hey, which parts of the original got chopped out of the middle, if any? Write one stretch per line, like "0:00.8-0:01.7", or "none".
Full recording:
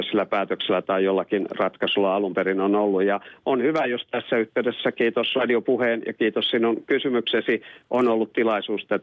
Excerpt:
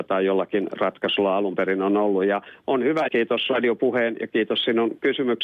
0:03.9-0:04.9